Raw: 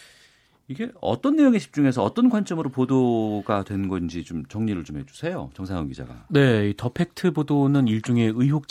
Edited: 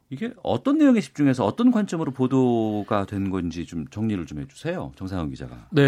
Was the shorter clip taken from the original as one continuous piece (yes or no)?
yes